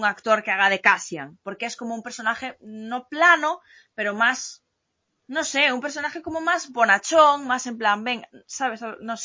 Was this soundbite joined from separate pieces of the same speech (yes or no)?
no